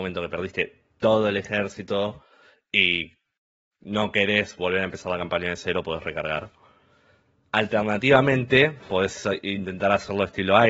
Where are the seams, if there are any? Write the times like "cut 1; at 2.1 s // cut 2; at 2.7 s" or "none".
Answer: none